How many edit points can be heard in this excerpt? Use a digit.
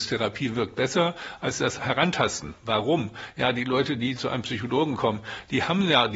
1